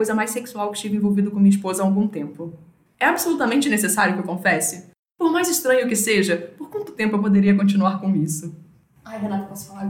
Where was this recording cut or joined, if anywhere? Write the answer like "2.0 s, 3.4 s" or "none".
2.9 s